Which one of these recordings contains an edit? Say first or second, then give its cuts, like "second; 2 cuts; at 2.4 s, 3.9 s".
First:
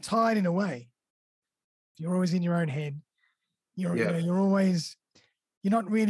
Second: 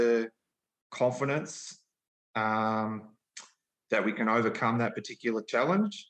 first; 1 cut; at 1.9 s